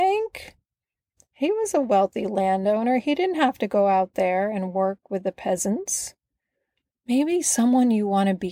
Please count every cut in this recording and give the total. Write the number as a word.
one